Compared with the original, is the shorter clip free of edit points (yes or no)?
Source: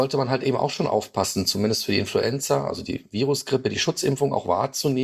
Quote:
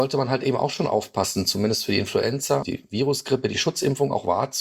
no